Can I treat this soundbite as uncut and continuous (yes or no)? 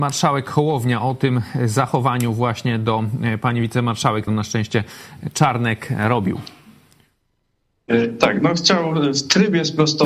no